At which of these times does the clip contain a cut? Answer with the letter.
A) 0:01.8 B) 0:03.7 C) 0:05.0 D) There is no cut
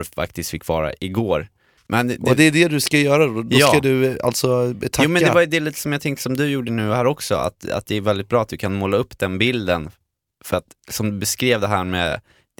A